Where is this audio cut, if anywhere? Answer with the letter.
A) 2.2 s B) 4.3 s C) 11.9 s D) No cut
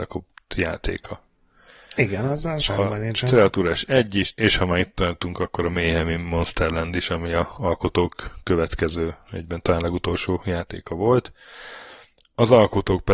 B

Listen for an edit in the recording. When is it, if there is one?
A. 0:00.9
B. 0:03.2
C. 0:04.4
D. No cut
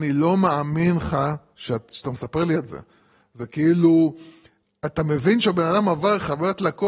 D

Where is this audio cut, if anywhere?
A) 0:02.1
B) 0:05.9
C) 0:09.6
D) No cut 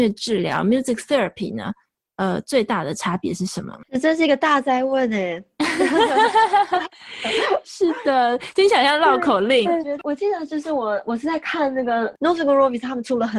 C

